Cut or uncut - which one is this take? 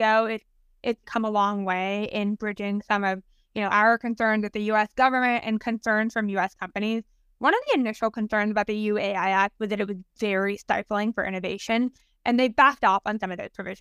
cut